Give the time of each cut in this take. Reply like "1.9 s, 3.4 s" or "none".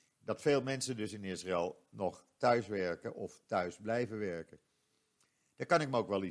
none